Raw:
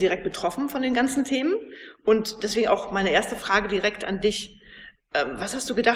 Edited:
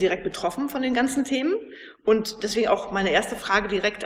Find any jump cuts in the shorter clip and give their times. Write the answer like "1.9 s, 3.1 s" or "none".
none